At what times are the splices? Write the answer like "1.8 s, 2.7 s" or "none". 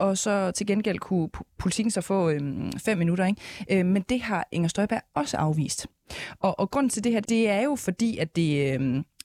7.2 s